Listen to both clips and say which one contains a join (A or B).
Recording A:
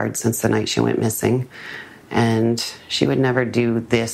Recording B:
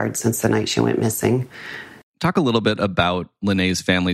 B